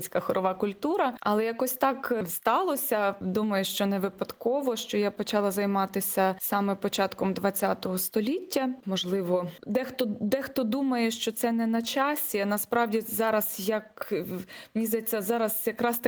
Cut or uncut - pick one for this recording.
cut